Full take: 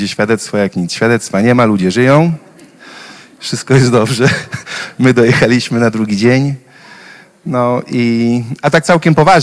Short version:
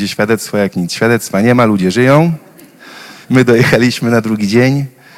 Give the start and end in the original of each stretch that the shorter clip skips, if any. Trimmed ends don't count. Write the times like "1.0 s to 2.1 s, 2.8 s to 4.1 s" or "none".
3.2 s to 4.9 s